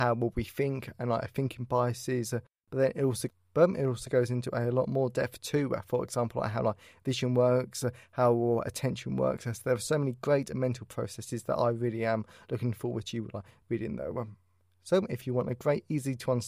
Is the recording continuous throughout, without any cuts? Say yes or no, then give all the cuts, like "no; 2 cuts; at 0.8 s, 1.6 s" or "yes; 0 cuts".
yes; 0 cuts